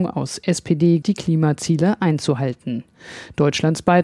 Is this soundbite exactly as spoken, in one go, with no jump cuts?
no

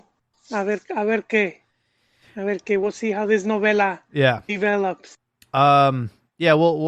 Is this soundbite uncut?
yes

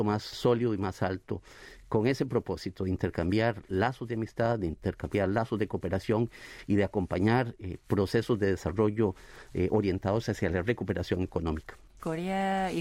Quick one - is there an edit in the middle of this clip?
no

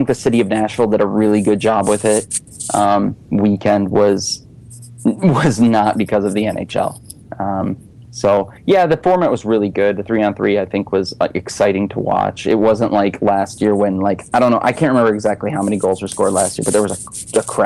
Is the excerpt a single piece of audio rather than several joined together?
no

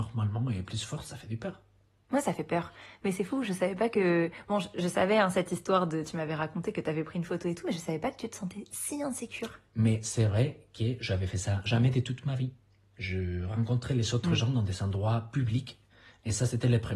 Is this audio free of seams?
no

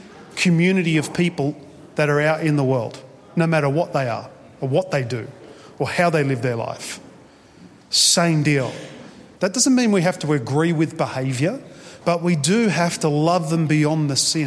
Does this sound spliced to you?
yes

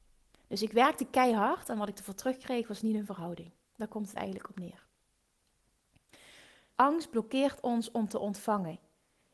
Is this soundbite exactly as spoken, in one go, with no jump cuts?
no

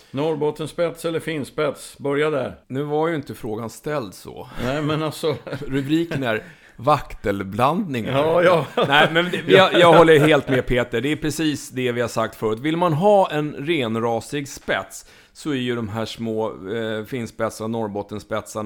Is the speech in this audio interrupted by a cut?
yes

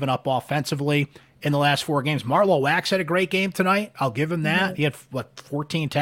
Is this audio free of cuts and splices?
yes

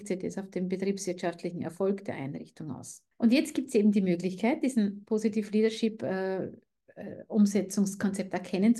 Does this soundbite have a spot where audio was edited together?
yes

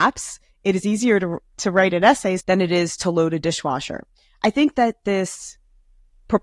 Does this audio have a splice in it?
yes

